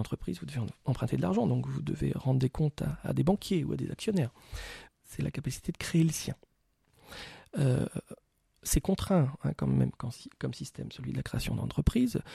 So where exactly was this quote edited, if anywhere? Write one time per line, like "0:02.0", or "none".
0:04.9